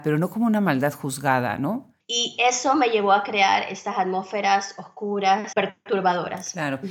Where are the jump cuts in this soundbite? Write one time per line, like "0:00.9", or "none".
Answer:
0:02.0
0:05.5